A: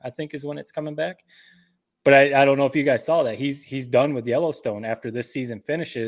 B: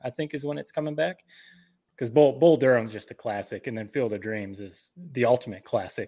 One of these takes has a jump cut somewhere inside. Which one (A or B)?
B